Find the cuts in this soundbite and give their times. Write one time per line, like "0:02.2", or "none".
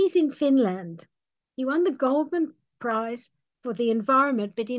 none